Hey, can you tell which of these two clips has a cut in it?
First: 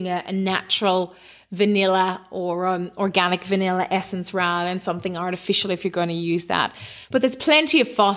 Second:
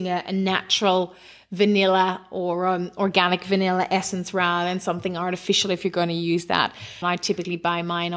second; 1 cut; at 7.0 s

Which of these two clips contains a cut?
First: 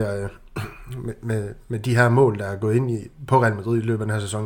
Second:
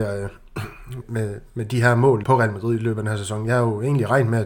second; 2 cuts; at 1.0 s, 2.2 s

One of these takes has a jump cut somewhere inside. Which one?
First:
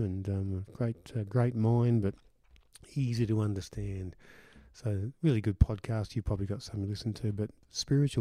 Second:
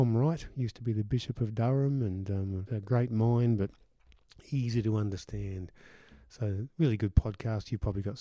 second; 1 cut; at 2.7 s

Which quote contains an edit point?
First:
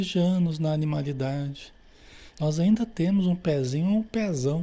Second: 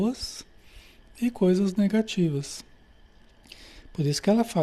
first; 1 cut; at 2.3 s

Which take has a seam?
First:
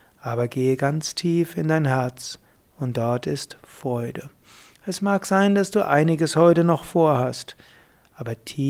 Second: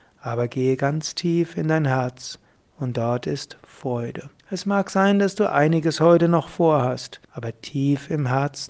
second; 2 cuts; at 4.4 s, 7.2 s

